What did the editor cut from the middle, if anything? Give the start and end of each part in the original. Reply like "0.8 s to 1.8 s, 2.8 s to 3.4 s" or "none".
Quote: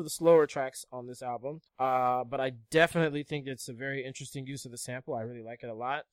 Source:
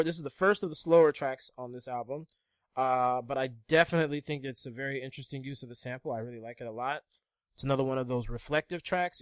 2.3 s to 2.6 s